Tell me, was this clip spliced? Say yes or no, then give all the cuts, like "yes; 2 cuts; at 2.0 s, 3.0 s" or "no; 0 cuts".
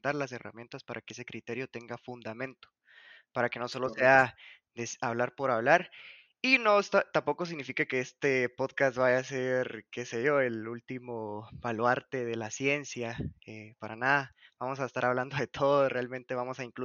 no; 0 cuts